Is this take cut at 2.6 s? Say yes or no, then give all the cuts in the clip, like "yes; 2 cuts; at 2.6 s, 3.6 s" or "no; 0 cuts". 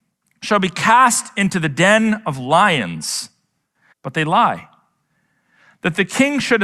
no; 1 cut; at 3.9 s